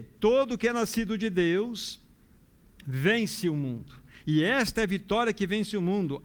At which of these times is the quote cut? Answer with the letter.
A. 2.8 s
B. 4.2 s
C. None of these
C